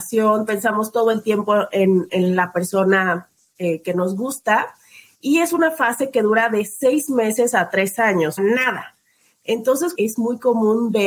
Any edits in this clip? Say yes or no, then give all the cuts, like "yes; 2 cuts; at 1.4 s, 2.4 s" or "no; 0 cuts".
yes; 2 cuts; at 8.4 s, 10.0 s